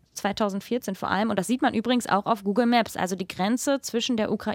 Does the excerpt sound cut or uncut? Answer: uncut